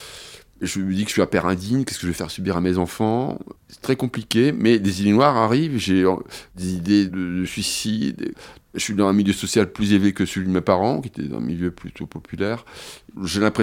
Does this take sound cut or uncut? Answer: cut